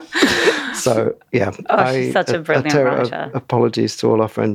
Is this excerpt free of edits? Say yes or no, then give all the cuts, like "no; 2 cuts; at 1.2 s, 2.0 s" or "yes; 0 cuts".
yes; 0 cuts